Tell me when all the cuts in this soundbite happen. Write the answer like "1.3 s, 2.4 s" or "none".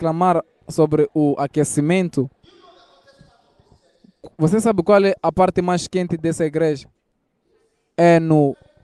none

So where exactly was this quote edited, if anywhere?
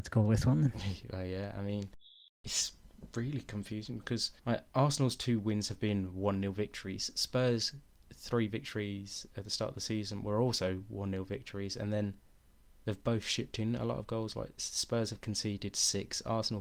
none

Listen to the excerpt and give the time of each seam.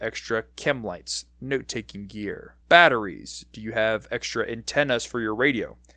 2.6 s

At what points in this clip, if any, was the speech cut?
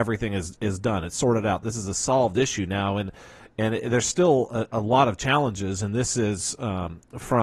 none

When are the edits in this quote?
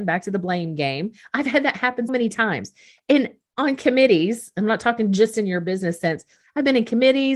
2.1 s

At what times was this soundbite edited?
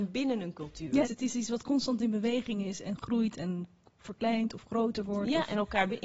1.0 s

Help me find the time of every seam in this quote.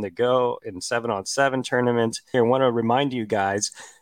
2.3 s

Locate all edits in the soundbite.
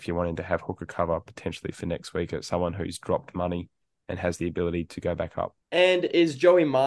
5.6 s

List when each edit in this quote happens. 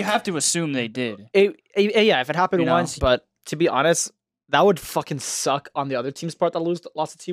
3.0 s

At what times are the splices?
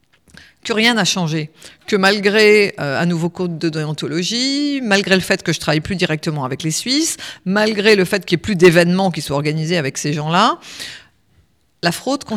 none

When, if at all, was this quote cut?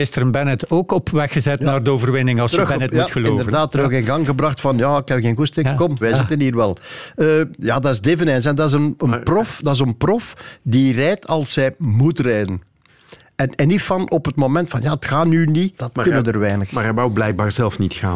6.0 s, 15.8 s

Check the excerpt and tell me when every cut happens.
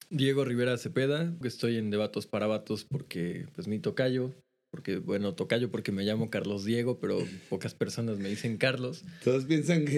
1.4 s

